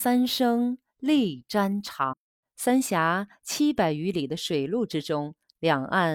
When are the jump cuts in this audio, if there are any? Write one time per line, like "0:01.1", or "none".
0:02.4